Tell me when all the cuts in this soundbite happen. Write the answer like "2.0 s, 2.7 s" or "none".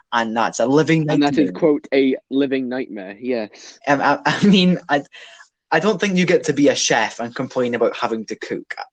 none